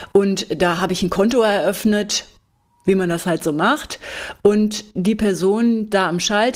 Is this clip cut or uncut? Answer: uncut